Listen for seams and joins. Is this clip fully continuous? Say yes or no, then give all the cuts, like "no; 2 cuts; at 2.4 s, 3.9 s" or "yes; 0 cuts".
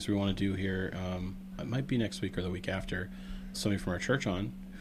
no; 2 cuts; at 1.5 s, 3.5 s